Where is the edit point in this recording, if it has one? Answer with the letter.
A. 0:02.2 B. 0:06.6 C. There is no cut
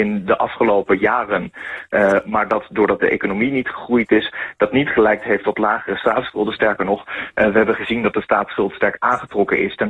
A